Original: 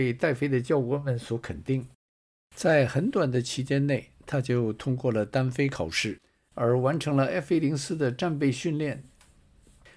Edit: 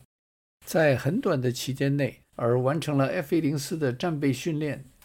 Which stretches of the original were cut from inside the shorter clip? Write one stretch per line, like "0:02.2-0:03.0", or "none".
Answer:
0:04.1-0:06.4